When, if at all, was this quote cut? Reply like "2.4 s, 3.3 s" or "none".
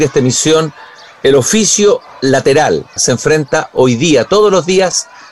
3.0 s